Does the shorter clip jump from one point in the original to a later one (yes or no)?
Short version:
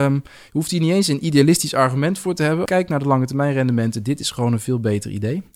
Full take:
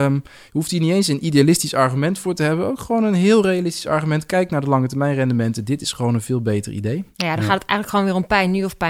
yes